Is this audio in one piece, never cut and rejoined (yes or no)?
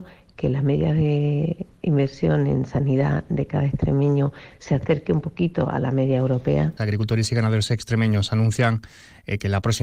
no